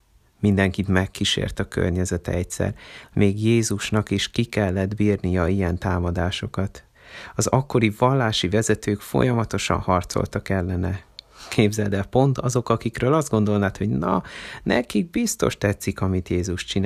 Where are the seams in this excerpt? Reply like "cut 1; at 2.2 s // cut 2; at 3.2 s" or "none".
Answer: none